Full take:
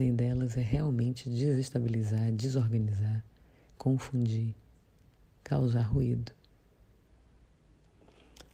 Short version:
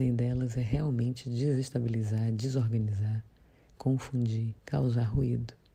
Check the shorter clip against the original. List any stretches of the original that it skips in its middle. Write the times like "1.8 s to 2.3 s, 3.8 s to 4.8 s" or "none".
4.6 s to 5.4 s